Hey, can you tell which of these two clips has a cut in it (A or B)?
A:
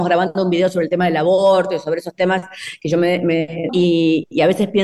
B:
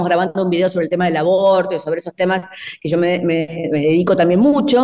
A